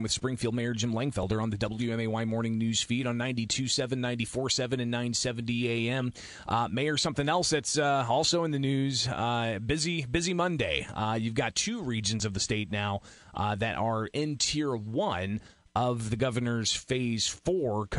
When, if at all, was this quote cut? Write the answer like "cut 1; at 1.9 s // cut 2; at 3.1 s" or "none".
none